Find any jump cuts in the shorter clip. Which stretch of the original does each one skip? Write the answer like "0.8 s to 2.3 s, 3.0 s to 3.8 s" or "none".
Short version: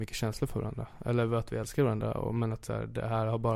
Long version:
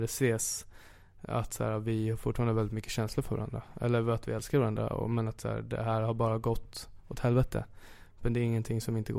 none

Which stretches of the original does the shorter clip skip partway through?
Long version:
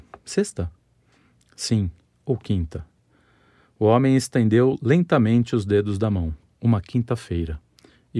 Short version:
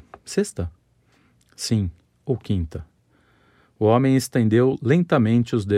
none

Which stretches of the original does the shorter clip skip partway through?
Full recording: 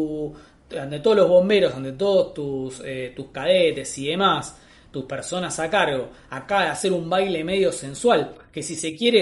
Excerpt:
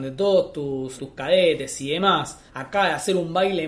2.8 s to 3.1 s, 4.6 s to 6.2 s

